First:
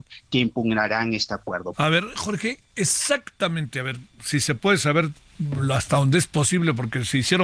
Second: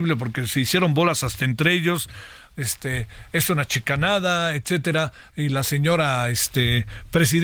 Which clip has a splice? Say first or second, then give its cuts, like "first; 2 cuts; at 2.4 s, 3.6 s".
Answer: first; 1 cut; at 1.7 s